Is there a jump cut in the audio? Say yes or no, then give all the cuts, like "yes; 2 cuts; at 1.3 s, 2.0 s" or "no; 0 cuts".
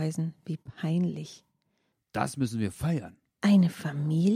yes; 1 cut; at 1.9 s